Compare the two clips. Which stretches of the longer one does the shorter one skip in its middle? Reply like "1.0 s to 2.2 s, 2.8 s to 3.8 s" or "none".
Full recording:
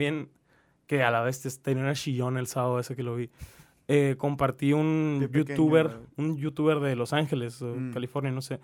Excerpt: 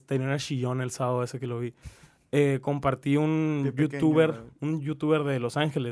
none